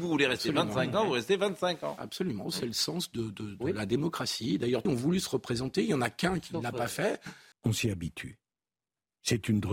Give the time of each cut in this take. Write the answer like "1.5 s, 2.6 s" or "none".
4.9 s, 7.5 s